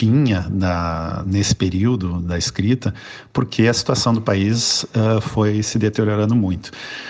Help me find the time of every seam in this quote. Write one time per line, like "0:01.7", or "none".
0:01.2